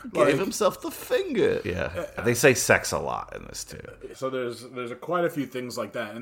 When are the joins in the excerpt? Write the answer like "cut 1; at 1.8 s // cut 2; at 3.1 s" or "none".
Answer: cut 1; at 2.2 s // cut 2; at 4.1 s